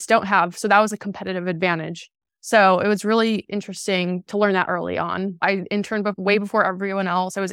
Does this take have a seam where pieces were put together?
yes; 1 cut; at 5.4 s

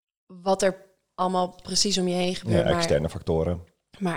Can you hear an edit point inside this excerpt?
no; 0 cuts

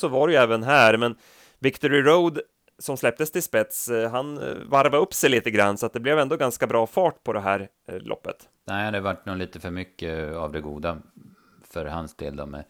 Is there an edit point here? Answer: yes; 1 cut; at 8.7 s

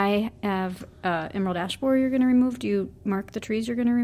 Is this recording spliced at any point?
no; 0 cuts

